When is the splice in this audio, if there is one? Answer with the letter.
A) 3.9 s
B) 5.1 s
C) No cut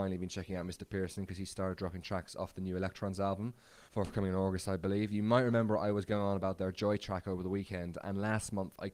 A